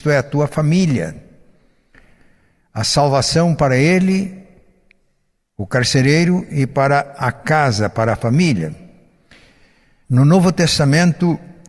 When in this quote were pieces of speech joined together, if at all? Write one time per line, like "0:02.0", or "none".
0:10.0